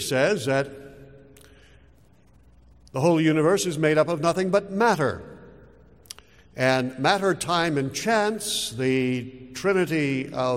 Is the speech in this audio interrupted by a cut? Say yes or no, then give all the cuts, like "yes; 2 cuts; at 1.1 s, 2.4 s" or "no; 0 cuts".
no; 0 cuts